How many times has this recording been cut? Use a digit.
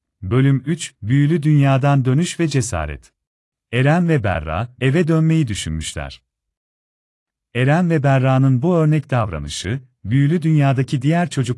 2